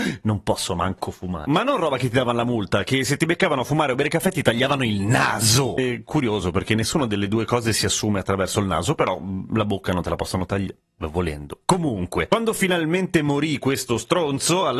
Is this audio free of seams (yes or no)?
yes